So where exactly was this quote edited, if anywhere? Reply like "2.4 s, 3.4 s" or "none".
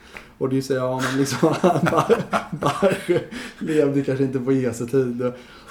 none